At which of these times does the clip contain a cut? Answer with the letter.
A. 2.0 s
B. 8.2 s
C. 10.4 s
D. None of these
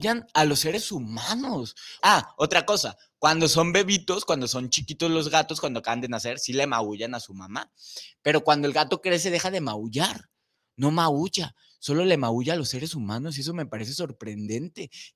A